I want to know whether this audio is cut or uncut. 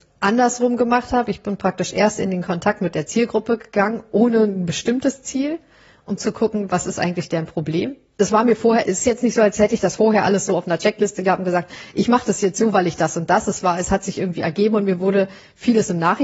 uncut